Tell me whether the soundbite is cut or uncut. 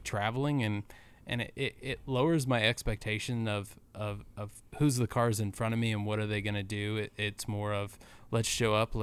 uncut